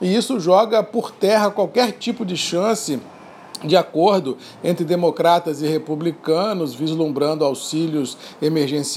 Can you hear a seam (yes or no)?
no